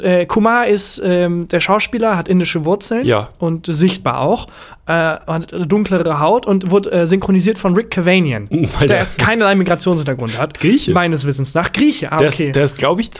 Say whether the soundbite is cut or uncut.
uncut